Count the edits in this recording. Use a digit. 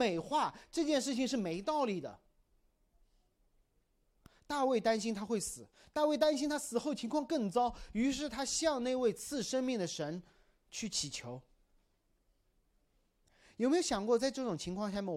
0